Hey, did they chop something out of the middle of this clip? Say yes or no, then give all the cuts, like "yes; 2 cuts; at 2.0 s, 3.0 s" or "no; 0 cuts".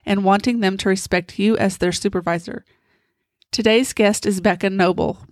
no; 0 cuts